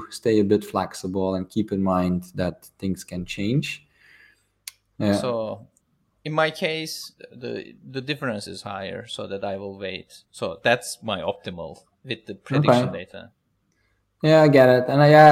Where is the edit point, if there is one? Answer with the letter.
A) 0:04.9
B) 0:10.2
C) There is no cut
A